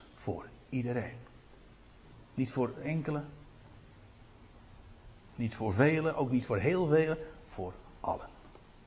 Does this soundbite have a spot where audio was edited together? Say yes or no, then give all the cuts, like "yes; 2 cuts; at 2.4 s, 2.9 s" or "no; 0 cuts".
no; 0 cuts